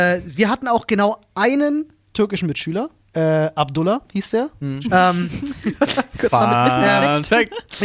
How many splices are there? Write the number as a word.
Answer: one